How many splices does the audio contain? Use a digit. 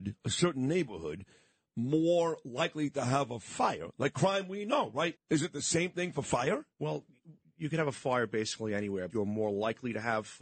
3